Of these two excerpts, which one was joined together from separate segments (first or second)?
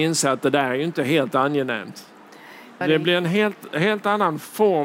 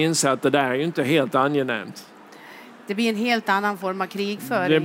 first